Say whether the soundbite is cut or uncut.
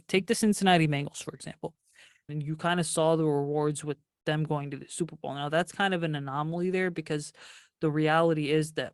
cut